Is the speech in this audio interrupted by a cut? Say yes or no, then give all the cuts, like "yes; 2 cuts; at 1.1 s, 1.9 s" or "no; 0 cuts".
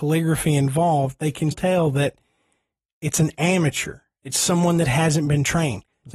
yes; 1 cut; at 1.5 s